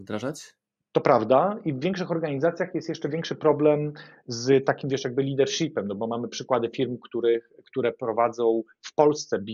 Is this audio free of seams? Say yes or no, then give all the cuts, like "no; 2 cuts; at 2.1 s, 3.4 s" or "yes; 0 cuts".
yes; 0 cuts